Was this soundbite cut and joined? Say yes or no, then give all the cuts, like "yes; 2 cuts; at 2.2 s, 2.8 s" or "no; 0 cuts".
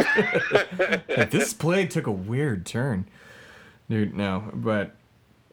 no; 0 cuts